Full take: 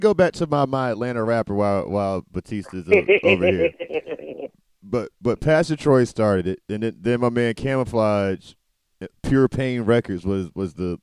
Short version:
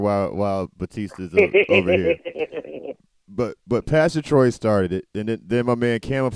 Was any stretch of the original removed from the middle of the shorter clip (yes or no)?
no